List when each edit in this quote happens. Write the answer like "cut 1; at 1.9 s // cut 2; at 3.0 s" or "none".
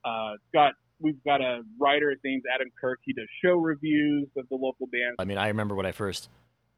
cut 1; at 5.2 s